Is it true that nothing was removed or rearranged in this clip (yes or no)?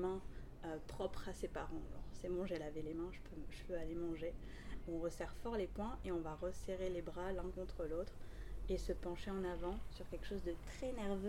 no